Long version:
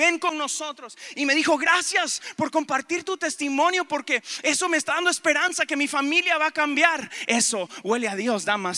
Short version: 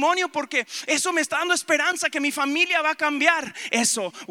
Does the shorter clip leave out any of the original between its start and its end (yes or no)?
no